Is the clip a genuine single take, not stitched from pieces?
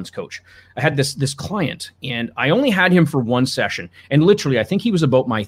yes; 0 cuts

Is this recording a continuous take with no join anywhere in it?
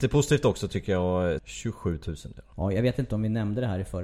no; 2 cuts; at 1.4 s, 2.5 s

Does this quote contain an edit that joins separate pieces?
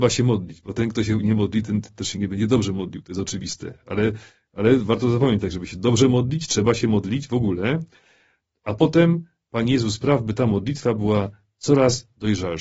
no; 0 cuts

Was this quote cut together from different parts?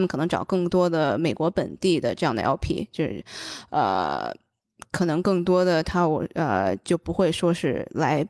no; 0 cuts

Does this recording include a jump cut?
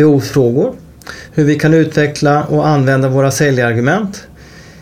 yes; 1 cut; at 1.3 s

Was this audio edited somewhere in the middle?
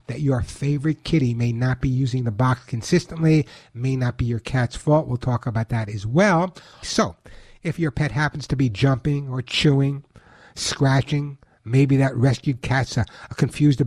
yes; 1 cut; at 6.8 s

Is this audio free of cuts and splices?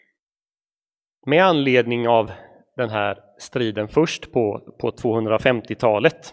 yes; 0 cuts

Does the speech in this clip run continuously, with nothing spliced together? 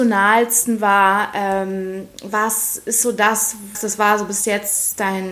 no; 1 cut; at 3.7 s

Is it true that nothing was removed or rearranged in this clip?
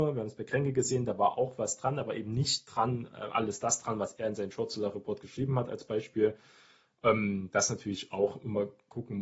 yes; 0 cuts

